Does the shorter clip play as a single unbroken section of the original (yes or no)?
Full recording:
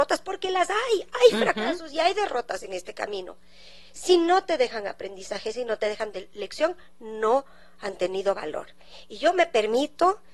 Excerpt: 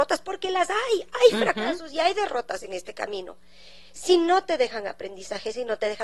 yes